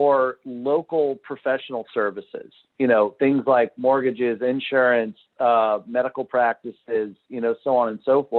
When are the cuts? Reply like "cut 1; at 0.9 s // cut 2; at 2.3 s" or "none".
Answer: none